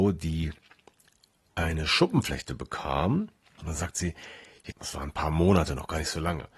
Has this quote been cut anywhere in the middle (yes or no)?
yes